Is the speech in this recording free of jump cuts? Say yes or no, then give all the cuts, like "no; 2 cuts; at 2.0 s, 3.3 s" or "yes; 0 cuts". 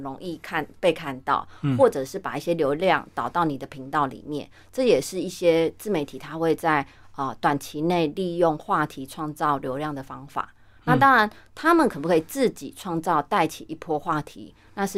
yes; 0 cuts